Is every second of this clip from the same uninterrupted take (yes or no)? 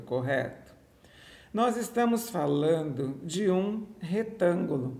yes